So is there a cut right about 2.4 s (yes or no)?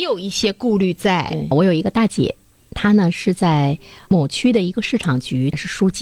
no